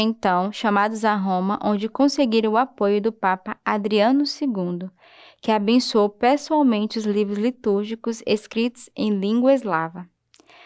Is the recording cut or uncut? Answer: uncut